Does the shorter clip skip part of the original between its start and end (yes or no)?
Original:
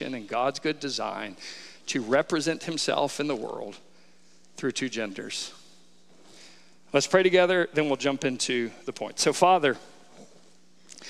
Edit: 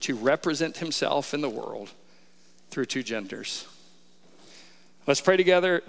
no